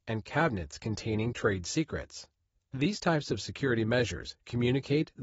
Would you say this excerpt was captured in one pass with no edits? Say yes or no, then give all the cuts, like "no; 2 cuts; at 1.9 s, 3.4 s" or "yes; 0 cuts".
yes; 0 cuts